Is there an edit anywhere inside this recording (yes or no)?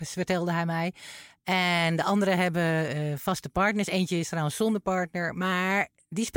no